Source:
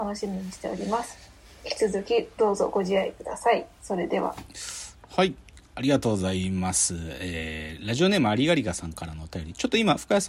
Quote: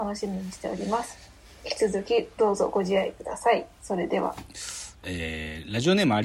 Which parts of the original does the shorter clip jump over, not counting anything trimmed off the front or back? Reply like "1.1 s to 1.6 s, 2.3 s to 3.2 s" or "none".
5.0 s to 7.2 s